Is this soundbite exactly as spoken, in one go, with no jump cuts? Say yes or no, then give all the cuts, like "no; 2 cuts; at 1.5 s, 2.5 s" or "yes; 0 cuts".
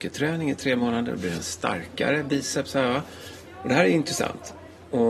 no; 1 cut; at 3.4 s